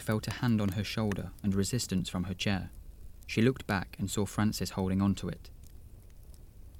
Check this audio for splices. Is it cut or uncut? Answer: uncut